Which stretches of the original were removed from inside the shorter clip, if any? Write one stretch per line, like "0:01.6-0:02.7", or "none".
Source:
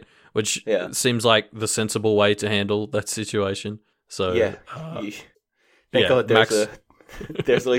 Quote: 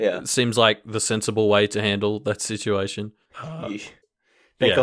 0:04.0-0:04.6